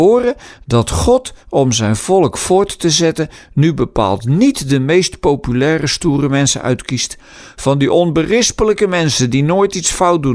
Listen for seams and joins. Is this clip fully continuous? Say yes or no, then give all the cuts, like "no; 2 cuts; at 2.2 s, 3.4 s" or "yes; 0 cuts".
yes; 0 cuts